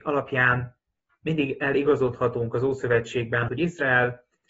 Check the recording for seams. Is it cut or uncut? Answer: cut